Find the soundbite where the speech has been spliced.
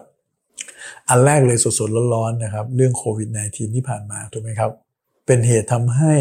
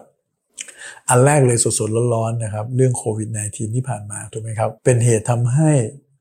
second; 1 cut; at 4.8 s

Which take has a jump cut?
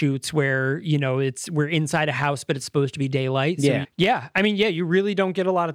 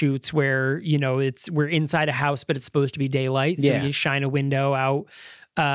first; 1 cut; at 3.8 s

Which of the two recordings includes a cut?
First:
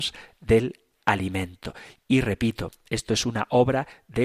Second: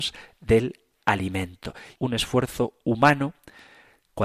second; 1 cut; at 2.0 s

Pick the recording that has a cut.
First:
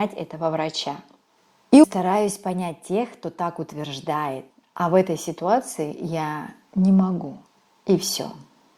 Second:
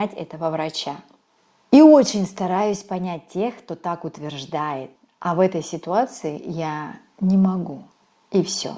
first; 1 cut; at 1.8 s

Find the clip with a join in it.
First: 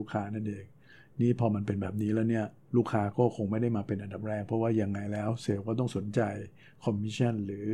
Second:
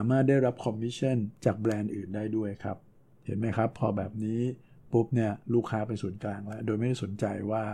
second; 2 cuts; at 1.3 s, 5.4 s

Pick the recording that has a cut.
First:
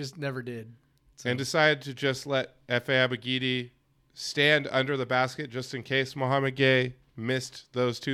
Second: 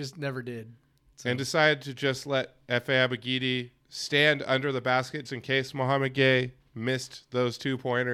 second; 2 cuts; at 3.8 s, 5.3 s

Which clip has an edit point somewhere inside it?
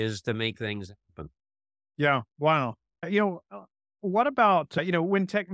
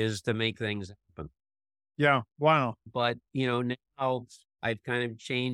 second; 1 cut; at 2.8 s

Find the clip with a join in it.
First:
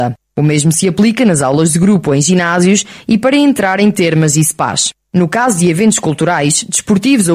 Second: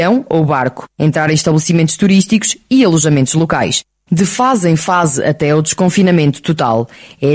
second; 1 cut; at 4.1 s

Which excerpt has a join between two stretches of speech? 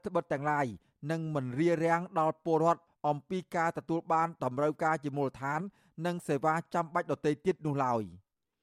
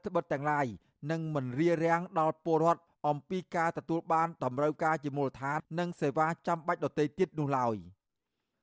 second; 1 cut; at 5.6 s

